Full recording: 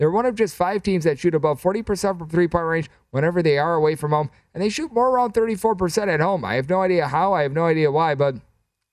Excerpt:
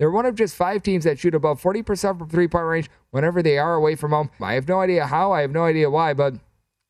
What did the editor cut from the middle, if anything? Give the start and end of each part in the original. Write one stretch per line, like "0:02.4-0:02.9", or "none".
0:04.4-0:06.4